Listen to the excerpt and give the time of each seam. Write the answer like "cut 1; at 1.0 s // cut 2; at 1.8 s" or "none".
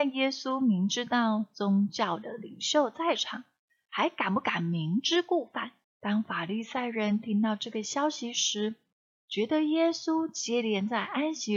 cut 1; at 5.8 s // cut 2; at 9.2 s